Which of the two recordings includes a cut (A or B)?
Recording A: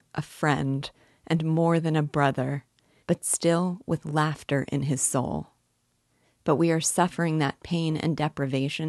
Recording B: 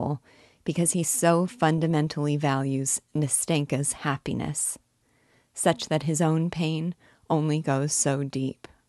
A